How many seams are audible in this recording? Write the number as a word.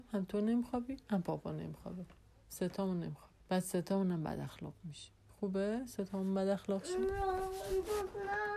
one